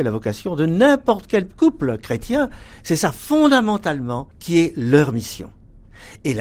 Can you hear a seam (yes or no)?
yes